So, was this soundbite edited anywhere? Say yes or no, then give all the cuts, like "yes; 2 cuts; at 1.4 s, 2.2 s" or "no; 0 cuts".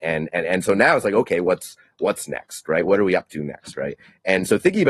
no; 0 cuts